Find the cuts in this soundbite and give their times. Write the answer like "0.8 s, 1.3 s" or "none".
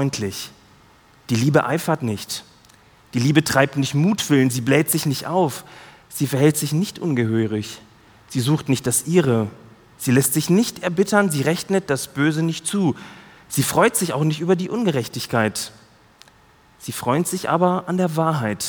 none